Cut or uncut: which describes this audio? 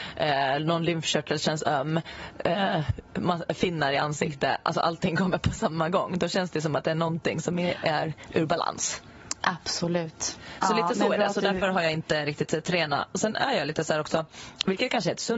uncut